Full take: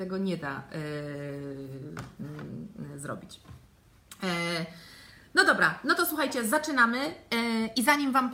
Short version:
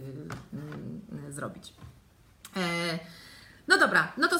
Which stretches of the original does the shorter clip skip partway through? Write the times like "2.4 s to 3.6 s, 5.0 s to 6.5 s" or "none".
none

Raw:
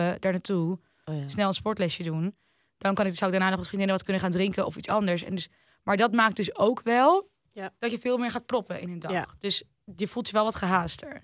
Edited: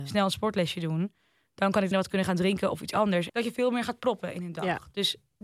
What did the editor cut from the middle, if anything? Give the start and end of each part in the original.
3.1 s to 3.9 s, 5.2 s to 7.8 s

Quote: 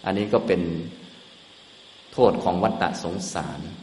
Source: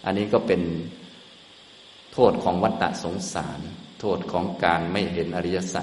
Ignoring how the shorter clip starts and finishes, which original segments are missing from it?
none

